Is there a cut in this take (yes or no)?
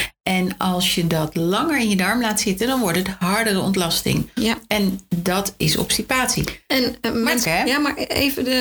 yes